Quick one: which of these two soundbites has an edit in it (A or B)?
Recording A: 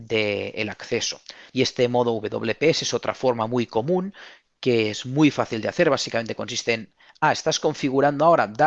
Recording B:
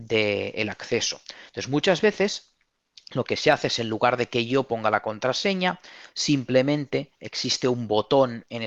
A